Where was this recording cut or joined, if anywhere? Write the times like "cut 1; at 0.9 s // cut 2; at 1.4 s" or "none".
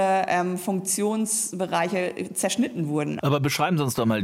cut 1; at 3.2 s